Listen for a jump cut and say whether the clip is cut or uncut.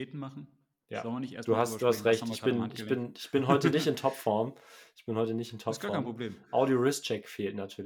uncut